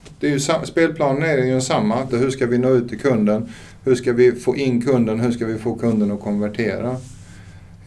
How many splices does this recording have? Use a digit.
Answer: 1